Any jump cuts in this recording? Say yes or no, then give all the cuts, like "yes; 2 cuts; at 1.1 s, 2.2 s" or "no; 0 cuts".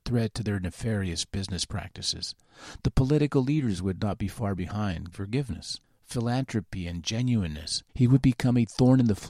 yes; 2 cuts; at 5.1 s, 7.9 s